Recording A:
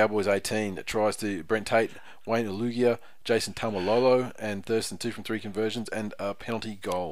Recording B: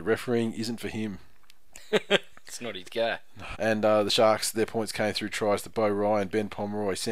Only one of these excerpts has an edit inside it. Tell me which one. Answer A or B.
B